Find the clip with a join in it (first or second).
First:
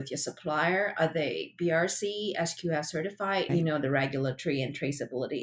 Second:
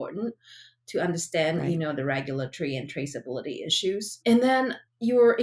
first